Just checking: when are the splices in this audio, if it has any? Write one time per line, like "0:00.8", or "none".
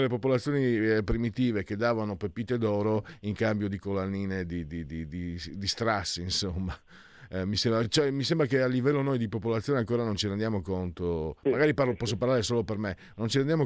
none